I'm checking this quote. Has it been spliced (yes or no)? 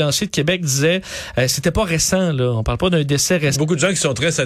yes